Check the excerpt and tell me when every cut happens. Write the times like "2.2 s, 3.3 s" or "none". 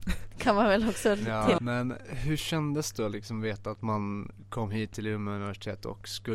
1.6 s